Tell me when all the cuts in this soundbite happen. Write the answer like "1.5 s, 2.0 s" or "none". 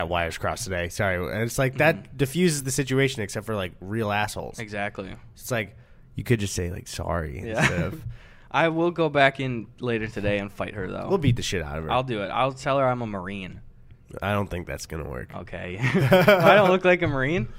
none